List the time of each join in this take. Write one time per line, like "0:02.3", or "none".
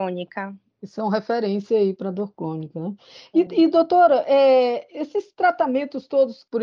none